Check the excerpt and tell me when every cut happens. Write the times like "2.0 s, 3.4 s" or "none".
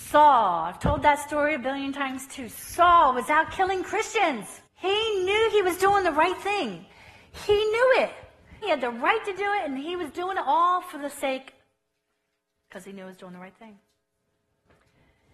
4.7 s, 8.6 s